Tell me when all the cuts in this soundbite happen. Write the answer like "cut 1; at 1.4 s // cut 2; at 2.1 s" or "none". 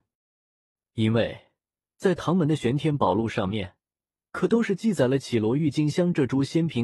none